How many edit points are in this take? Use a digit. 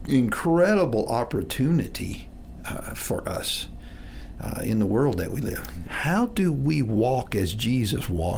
1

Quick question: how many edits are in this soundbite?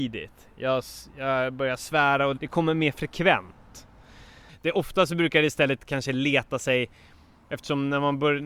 2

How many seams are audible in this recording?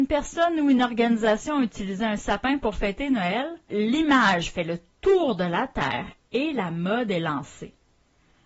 1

